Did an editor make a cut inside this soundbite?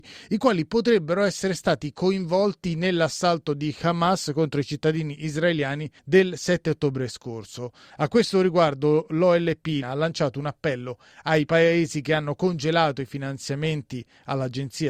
yes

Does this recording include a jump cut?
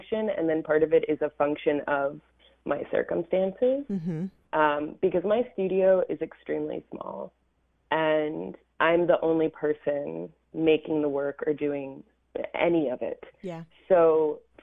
no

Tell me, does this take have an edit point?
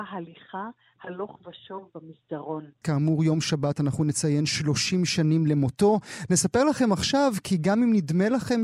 yes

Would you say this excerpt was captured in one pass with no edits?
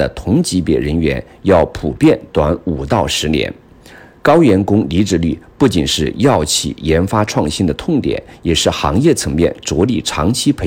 yes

